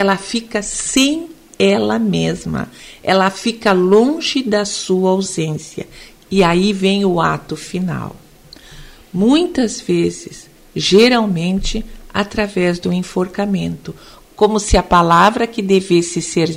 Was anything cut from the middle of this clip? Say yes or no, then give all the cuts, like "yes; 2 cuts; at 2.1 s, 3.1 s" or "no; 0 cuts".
no; 0 cuts